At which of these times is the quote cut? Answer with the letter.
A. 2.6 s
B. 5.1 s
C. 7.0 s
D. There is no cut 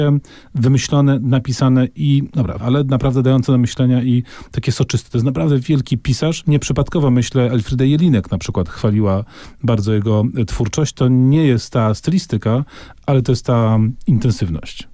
A